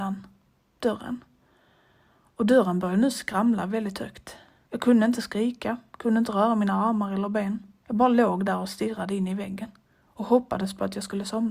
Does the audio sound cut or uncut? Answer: cut